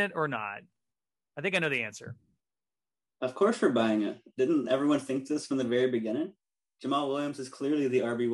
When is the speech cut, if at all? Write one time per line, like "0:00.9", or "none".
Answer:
none

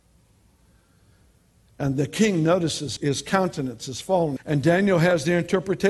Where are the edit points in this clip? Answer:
0:03.0
0:04.4

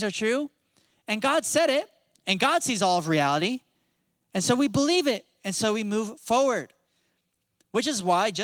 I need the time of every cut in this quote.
none

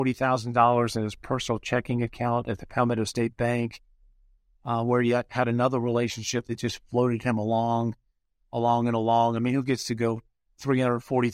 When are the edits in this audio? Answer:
none

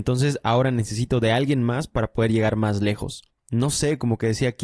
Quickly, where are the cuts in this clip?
none

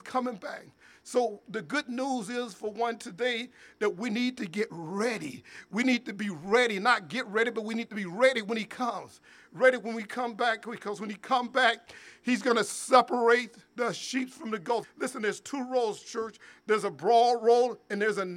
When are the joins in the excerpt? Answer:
0:14.8

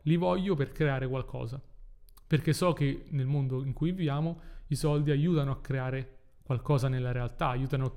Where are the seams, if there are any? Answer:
none

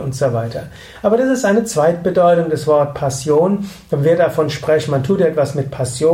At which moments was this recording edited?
none

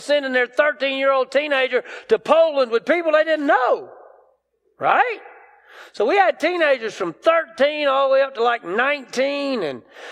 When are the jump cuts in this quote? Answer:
none

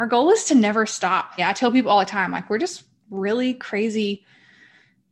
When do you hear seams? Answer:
0:01.4

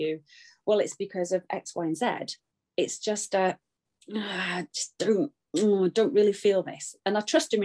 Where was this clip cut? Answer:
none

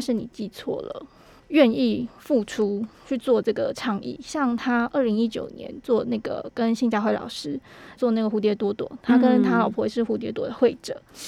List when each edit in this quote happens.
0:01.4
0:08.0
0:10.3

